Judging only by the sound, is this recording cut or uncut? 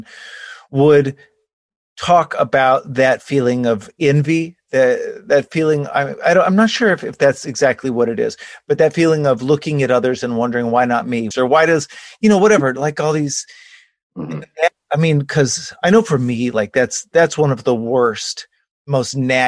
cut